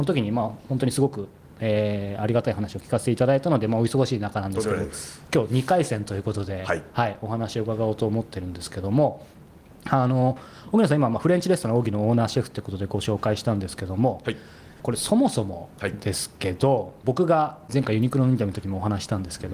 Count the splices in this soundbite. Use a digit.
0